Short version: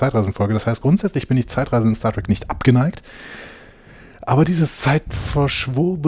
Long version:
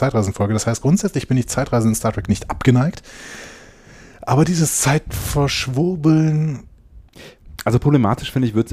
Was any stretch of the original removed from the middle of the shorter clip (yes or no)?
no